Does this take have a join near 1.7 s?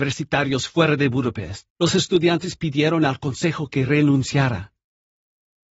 yes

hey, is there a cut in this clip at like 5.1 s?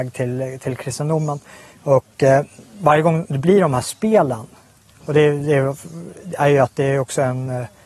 no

